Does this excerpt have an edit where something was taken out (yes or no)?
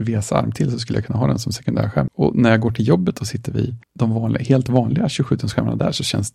yes